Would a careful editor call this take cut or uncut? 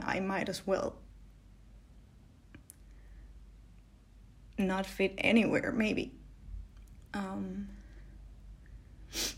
cut